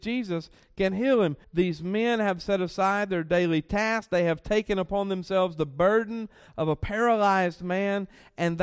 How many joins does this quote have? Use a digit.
1